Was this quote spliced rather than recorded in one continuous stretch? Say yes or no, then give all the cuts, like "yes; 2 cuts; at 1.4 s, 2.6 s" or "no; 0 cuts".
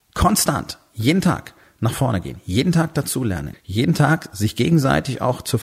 yes; 1 cut; at 3.5 s